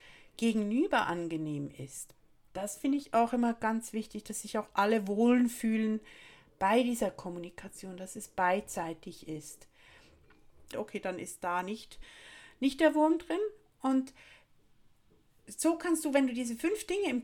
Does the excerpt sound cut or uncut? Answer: cut